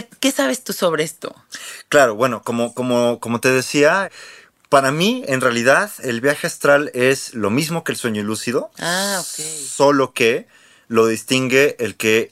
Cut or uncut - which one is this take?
uncut